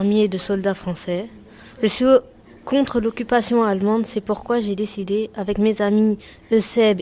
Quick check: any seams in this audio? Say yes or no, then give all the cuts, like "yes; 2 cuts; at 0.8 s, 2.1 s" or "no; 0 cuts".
no; 0 cuts